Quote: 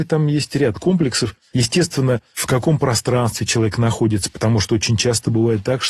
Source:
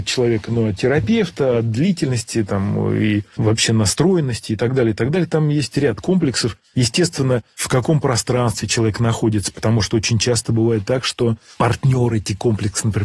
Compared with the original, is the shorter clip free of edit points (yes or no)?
yes